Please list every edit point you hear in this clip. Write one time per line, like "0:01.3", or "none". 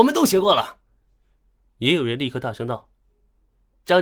none

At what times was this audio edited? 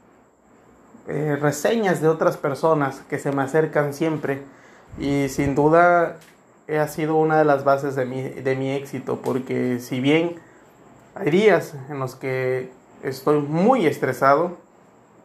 0:04.9

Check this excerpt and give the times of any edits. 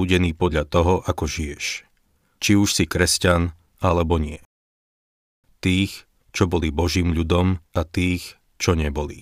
0:05.4
0:07.7

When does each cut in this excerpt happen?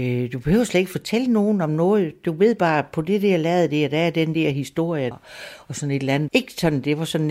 0:05.1
0:06.3

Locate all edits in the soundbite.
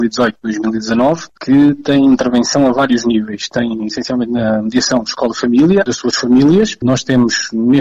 0:05.9

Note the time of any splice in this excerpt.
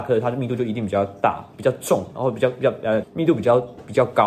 0:03.0

